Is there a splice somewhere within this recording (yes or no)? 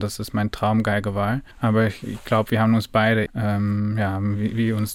yes